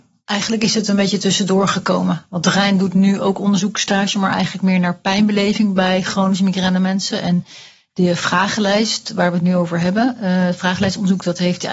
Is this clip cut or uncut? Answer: uncut